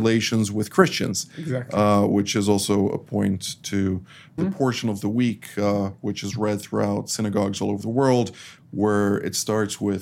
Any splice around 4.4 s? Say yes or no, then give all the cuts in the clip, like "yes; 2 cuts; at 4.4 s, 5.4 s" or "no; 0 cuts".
yes; 2 cuts; at 4.4 s, 8.6 s